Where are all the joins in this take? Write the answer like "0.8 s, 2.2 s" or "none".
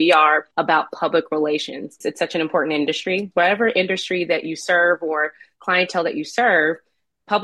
2.0 s, 3.3 s